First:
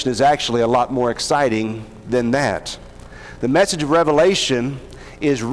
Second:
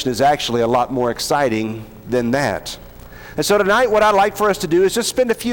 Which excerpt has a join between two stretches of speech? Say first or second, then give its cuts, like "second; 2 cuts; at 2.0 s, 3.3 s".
second; 1 cut; at 3.3 s